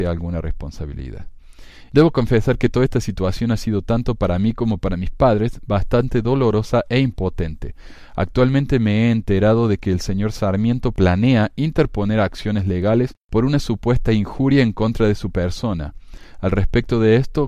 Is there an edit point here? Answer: no; 0 cuts

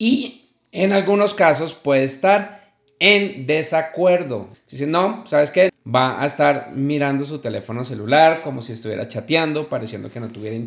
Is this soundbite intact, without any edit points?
no; 2 cuts; at 4.5 s, 5.7 s

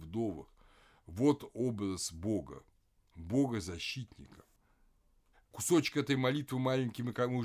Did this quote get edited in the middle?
yes; 1 cut; at 5.3 s

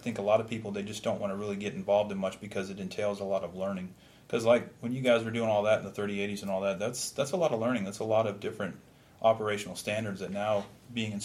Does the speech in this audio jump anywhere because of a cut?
no; 0 cuts

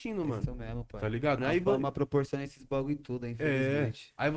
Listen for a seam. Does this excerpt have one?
yes; 1 cut; at 1.4 s

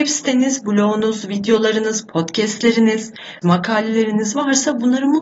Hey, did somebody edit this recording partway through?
yes; 1 cut; at 3.4 s

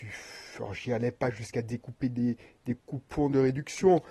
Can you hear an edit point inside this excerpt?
no; 0 cuts

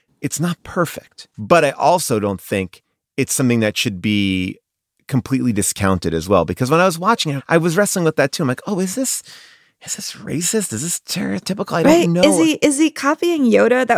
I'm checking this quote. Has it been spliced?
yes; 1 cut; at 7.4 s

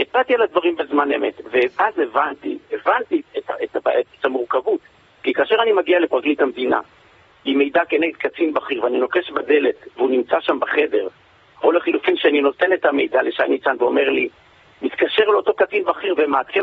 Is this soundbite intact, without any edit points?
yes; 0 cuts

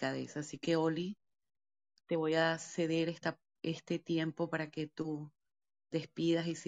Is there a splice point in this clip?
no; 0 cuts

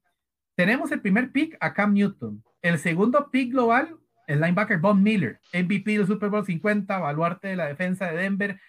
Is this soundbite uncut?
no; 1 cut; at 5.4 s

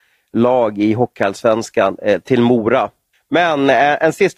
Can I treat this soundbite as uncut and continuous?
no; 1 cut; at 3.1 s

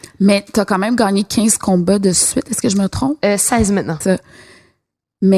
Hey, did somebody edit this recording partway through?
yes; 1 cut; at 4.0 s

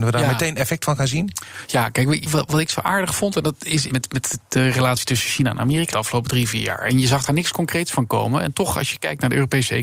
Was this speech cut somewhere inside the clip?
yes; 2 cuts; at 3.9 s, 5.9 s

